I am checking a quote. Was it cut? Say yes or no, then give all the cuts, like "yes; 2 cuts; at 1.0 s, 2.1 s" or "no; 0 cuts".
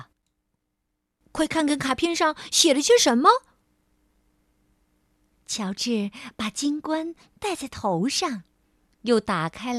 no; 0 cuts